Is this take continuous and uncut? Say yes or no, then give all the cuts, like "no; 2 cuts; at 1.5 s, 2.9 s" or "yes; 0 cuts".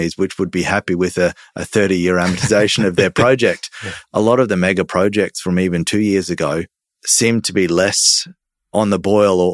no; 1 cut; at 4.0 s